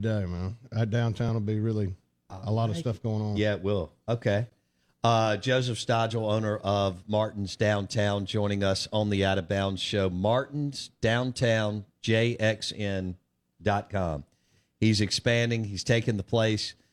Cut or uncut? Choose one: uncut